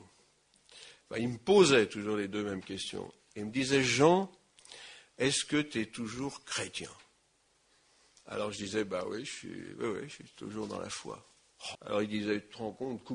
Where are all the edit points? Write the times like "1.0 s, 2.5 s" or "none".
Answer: 11.7 s